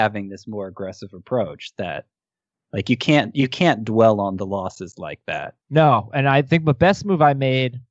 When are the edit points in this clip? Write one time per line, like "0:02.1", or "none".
0:05.6